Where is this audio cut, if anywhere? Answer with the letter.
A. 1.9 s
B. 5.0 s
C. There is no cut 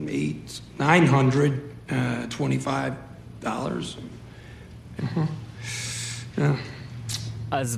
B